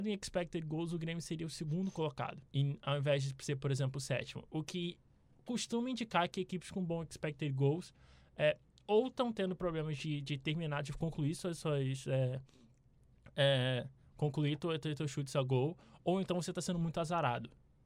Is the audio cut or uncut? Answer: cut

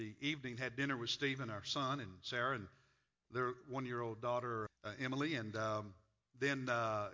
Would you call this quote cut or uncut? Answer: cut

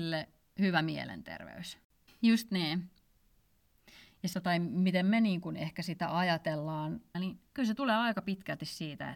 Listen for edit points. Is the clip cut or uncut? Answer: cut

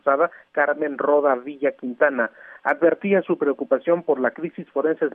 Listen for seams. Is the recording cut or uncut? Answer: uncut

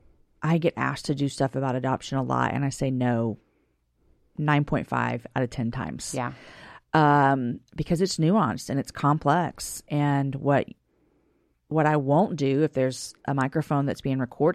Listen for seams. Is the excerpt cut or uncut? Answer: uncut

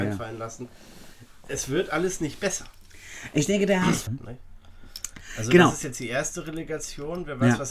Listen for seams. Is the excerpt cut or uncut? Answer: cut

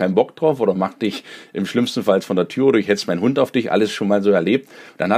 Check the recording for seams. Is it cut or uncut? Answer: uncut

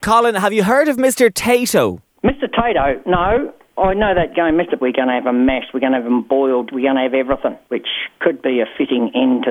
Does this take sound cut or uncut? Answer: cut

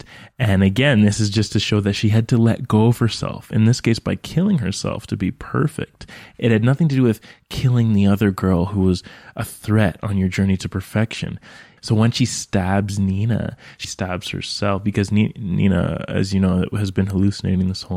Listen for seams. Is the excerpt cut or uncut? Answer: cut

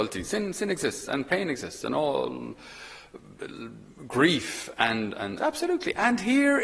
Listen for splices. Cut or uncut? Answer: cut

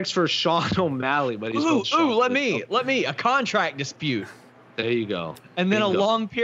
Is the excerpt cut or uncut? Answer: uncut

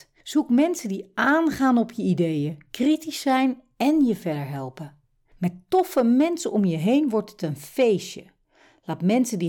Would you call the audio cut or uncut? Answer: uncut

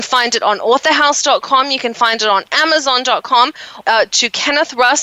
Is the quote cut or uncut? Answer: cut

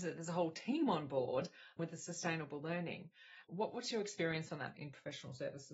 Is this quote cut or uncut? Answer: cut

